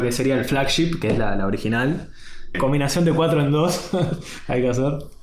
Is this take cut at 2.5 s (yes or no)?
yes